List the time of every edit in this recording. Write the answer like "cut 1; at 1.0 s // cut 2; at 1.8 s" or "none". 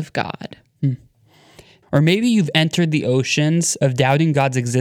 cut 1; at 1.8 s